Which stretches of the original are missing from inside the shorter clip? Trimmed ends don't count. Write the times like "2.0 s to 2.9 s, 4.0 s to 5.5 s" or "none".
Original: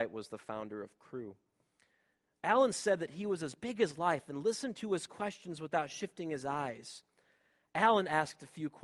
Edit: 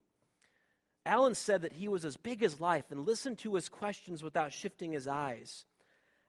none